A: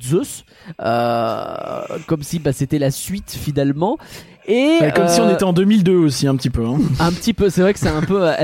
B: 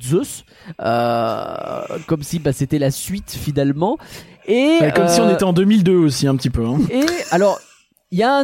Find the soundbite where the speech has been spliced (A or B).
B